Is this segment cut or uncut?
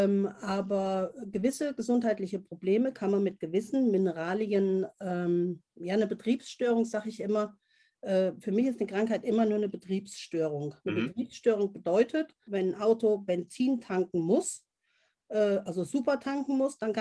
cut